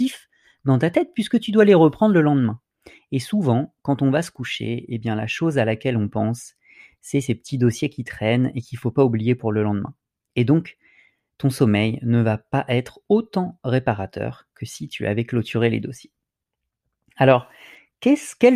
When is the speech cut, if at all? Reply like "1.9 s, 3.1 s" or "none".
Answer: none